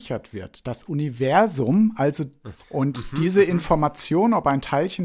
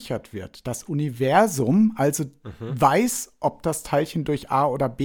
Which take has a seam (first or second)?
first